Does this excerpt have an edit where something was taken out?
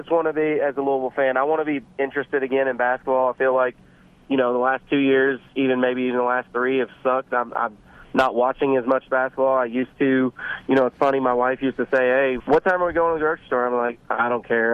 yes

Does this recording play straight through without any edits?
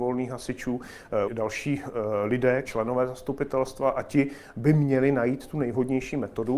no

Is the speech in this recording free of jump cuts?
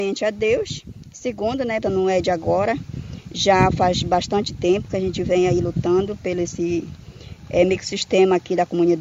no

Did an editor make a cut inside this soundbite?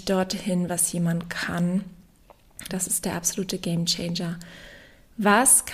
yes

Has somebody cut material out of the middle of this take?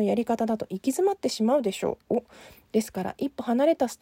yes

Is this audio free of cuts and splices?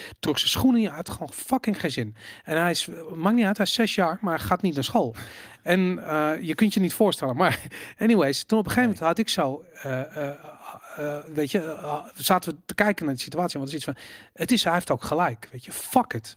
no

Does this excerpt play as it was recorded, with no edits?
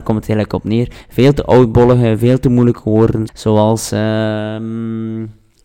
no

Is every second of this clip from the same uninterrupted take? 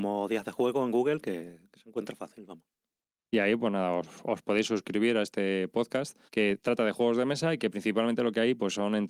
no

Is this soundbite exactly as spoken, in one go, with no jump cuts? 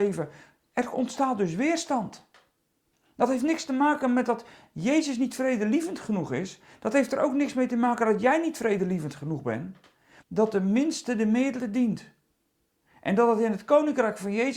no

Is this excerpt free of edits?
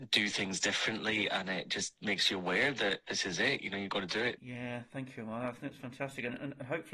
no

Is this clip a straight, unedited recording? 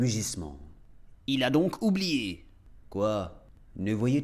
no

